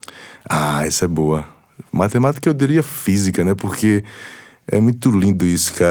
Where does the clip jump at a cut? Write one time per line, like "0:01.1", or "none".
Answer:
none